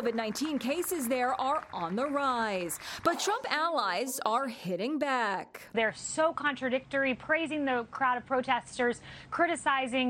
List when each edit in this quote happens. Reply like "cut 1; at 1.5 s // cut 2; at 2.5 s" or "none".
cut 1; at 5.7 s